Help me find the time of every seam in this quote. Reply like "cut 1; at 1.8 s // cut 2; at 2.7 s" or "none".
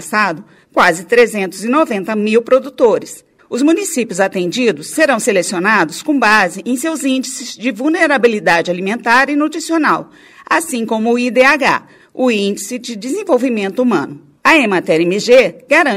cut 1; at 3.4 s // cut 2; at 14.4 s